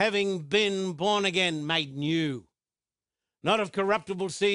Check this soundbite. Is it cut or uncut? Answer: uncut